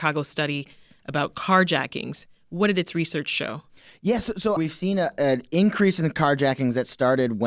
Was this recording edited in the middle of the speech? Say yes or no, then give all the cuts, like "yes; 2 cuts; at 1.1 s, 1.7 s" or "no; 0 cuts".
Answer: yes; 1 cut; at 4.6 s